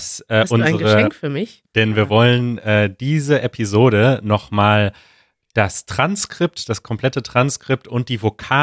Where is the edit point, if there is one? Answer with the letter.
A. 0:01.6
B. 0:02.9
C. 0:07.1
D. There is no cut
A